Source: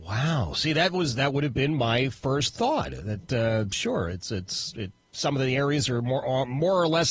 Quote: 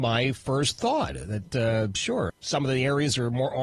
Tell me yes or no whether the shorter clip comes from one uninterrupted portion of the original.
no